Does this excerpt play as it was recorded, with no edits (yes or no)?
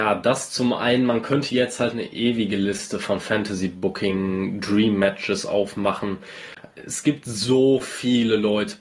yes